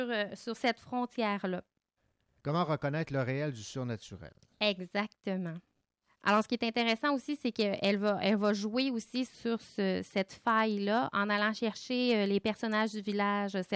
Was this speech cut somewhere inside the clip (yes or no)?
no